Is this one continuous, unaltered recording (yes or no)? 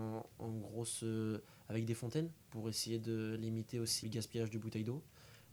no